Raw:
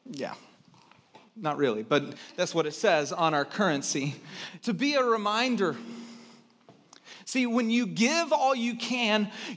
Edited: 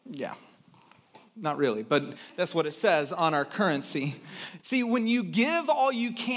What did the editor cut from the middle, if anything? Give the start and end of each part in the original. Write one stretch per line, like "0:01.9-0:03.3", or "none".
0:04.6-0:07.2